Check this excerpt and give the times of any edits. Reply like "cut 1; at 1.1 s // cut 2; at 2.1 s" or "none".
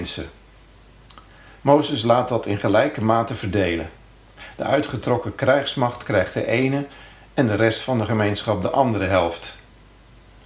none